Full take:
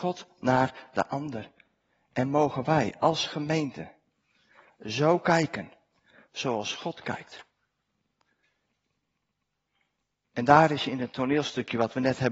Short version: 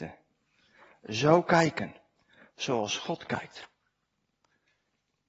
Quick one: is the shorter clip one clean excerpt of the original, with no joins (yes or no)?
yes